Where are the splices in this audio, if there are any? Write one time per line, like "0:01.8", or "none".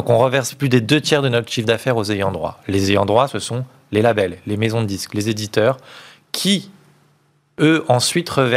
none